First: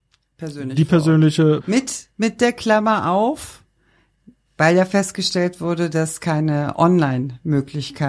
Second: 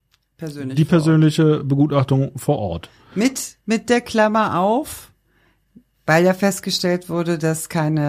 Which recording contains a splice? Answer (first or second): first